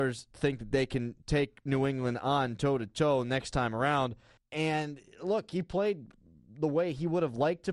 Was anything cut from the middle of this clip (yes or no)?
yes